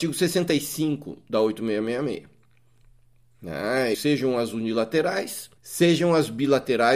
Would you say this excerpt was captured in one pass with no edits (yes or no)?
no